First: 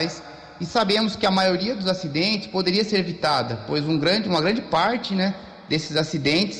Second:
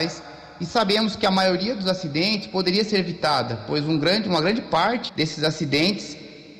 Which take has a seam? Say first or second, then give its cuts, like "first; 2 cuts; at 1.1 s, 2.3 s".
second; 1 cut; at 5.1 s